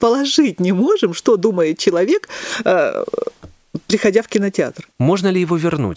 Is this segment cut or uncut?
cut